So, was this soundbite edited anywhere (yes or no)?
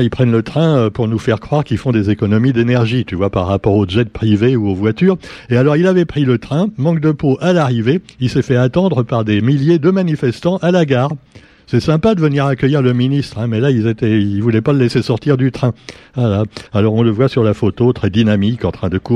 yes